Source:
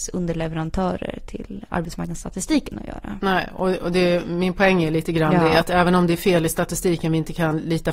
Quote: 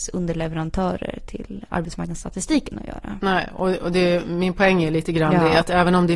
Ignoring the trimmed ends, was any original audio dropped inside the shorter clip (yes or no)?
no